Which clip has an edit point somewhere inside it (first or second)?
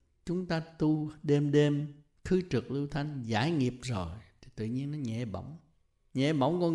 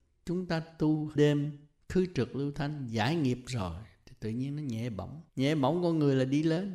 second